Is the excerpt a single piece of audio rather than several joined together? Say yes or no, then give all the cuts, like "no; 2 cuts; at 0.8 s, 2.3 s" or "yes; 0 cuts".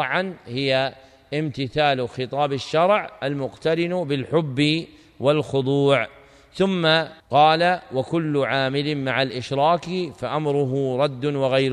no; 1 cut; at 7.2 s